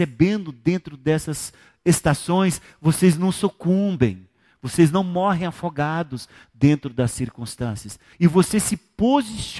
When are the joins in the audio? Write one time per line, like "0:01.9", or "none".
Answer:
0:08.1